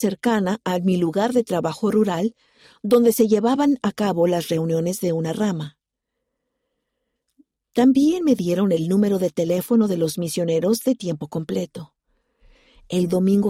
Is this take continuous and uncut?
yes; 0 cuts

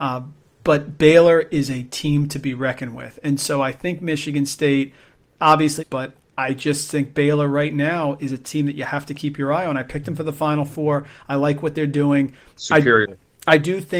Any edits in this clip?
yes; 1 cut; at 5.8 s

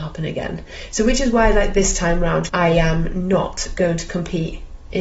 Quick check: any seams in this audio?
yes; 1 cut; at 2.5 s

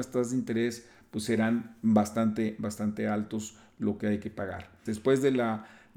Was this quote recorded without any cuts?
no; 1 cut; at 4.9 s

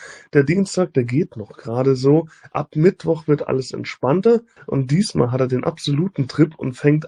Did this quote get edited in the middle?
yes; 1 cut; at 4.6 s

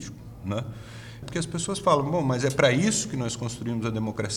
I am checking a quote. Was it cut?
yes; 1 cut; at 1.2 s

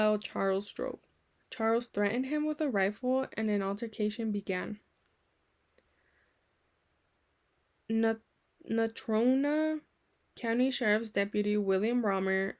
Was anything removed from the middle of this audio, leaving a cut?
yes; 1 cut; at 1.4 s

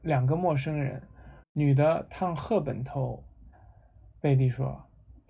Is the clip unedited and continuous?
no; 2 cuts; at 1.4 s, 3.5 s

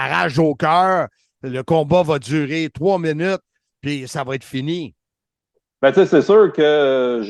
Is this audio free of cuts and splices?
yes; 0 cuts

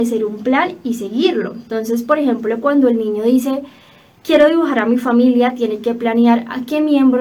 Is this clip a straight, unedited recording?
yes; 0 cuts

